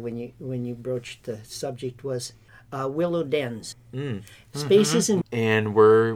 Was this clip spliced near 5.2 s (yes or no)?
yes